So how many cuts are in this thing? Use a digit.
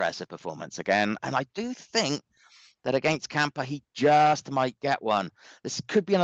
0